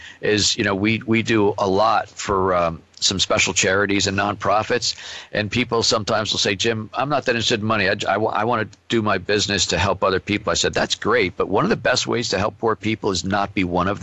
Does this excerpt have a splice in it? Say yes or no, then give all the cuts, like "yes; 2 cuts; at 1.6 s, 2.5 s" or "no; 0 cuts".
no; 0 cuts